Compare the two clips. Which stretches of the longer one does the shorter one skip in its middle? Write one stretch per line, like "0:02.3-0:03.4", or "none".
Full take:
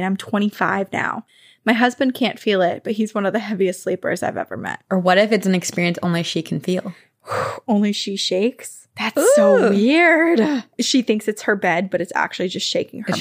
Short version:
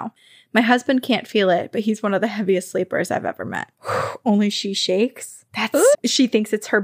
0:04.9-0:07.2
0:09.4-0:10.7